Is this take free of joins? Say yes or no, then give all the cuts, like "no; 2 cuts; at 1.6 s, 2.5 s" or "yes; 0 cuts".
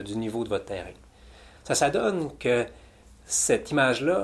yes; 0 cuts